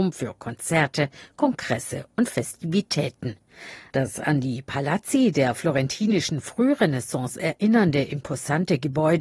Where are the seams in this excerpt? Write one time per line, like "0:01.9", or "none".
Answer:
0:03.9